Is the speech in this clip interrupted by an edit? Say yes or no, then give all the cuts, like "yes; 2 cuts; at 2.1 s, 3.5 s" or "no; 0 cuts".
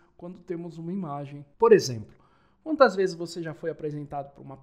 no; 0 cuts